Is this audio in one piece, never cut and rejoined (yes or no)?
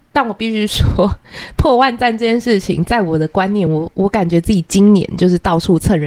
yes